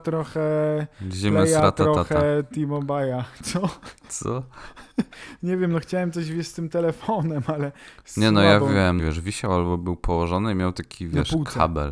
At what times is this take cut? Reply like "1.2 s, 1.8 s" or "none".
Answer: 9.0 s